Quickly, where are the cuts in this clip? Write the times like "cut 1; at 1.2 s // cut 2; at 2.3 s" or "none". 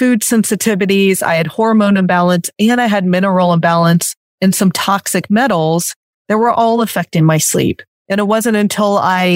none